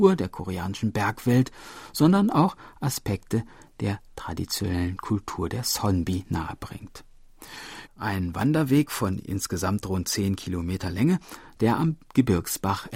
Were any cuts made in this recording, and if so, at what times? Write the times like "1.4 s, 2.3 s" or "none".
7.9 s